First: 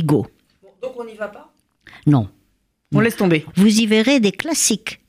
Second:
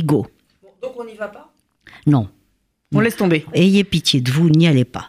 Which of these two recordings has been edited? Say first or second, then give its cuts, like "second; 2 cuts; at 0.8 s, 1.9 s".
first; 1 cut; at 3.5 s